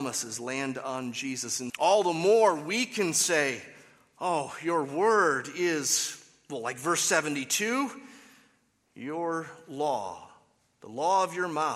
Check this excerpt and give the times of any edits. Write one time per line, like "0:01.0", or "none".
0:01.7